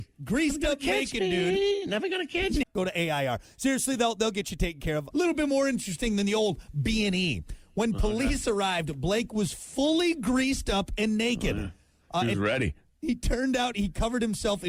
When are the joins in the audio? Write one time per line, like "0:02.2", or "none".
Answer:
0:02.6
0:05.1